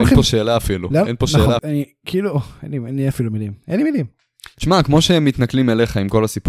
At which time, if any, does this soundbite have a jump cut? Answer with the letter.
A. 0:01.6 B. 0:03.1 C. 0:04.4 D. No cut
A